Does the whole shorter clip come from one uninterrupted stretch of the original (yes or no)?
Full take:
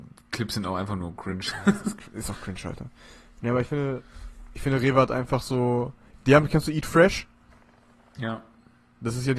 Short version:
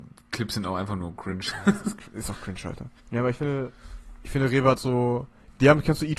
no